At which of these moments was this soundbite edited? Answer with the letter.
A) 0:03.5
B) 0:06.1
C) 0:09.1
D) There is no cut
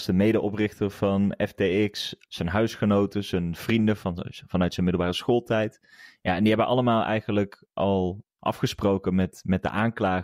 A